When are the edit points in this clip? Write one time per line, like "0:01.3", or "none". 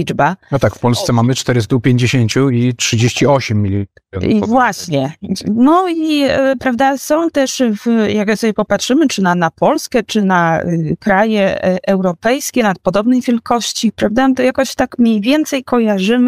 none